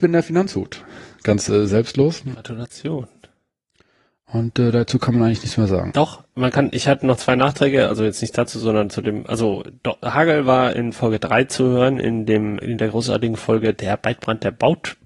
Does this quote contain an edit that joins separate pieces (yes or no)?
yes